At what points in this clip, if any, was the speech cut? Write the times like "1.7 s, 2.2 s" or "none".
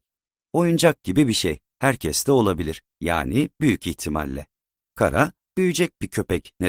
2.9 s